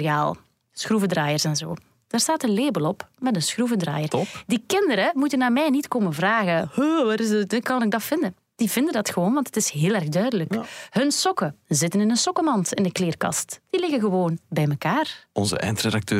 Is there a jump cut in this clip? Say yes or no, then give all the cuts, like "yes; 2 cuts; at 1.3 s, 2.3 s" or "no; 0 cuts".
no; 0 cuts